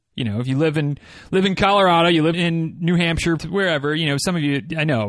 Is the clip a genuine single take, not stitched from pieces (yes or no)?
no